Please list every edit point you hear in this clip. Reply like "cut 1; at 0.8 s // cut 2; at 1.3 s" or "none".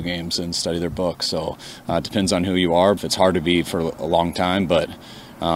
cut 1; at 3.0 s